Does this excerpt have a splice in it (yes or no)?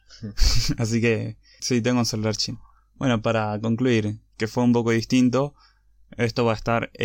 yes